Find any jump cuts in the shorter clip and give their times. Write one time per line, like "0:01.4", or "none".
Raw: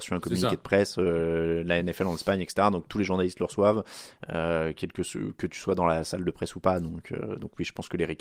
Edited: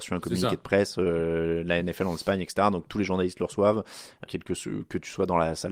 0:04.3